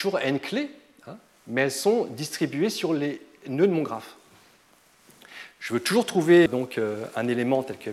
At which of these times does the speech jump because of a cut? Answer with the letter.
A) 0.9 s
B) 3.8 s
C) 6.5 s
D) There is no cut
C